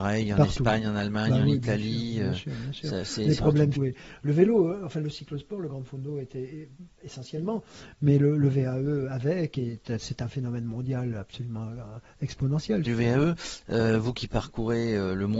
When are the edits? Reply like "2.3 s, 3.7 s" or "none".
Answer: 3.8 s, 12.9 s